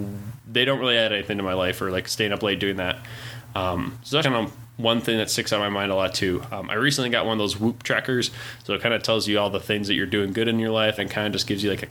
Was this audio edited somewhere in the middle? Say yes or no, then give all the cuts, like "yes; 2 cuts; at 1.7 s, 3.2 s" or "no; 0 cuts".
yes; 2 cuts; at 4.2 s, 11.0 s